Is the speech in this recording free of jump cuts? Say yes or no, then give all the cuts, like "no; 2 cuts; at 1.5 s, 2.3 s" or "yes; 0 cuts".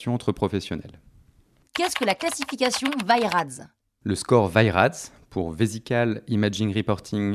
no; 1 cut; at 1.6 s